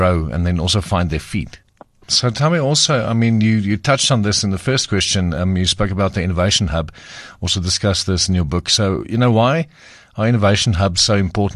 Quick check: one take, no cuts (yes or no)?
no